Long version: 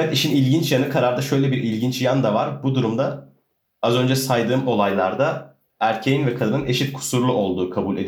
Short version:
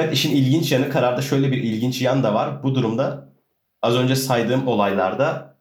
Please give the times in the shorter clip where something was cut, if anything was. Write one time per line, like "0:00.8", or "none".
none